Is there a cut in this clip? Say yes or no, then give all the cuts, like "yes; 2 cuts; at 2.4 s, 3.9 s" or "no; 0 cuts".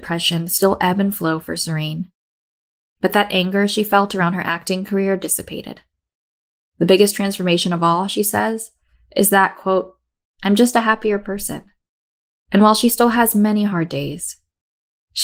no; 0 cuts